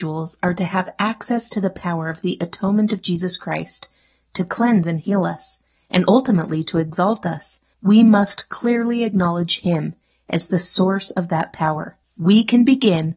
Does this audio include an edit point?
yes; 2 cuts; at 5.7 s, 7.7 s

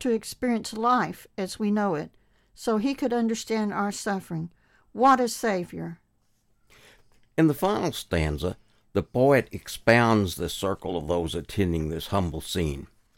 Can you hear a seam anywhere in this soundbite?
no; 0 cuts

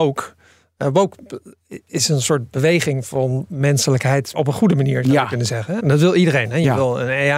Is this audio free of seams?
no; 2 cuts; at 4.4 s, 5.8 s

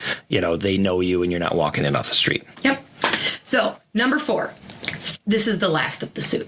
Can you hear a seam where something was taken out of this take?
yes; 1 cut; at 2.6 s

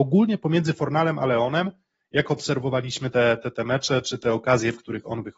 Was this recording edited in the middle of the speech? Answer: no; 0 cuts

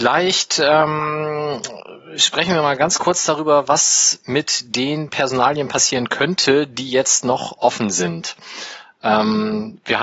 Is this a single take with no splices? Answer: yes; 0 cuts

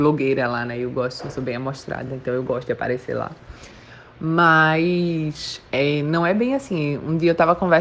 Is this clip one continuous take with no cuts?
yes; 0 cuts

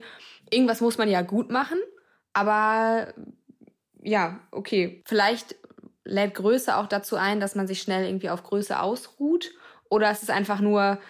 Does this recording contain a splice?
no; 0 cuts

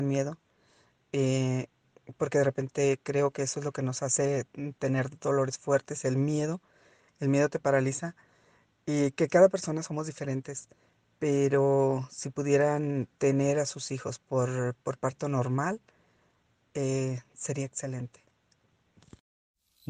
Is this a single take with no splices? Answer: yes; 0 cuts

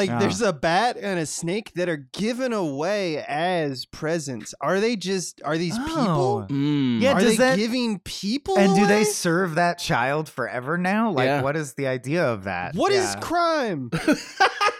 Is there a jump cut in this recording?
no; 0 cuts

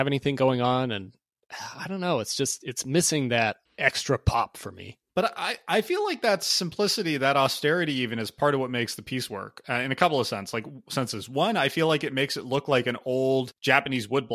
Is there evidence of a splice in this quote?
no; 0 cuts

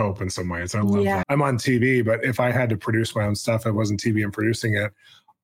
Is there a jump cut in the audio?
yes; 1 cut; at 1.2 s

